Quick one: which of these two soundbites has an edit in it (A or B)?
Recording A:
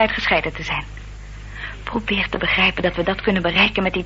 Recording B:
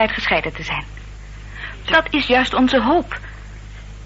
B